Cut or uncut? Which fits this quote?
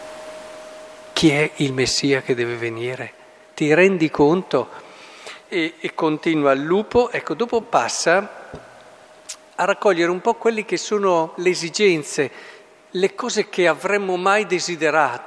uncut